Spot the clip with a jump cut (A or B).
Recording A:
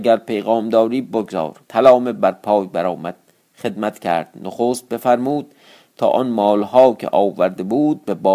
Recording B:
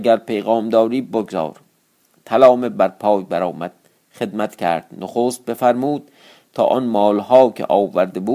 A